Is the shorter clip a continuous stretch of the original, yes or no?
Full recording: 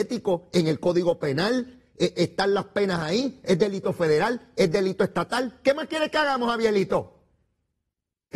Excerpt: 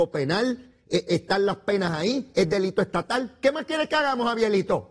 no